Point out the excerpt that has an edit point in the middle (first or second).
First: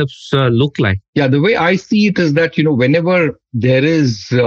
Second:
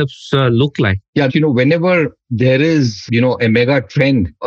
second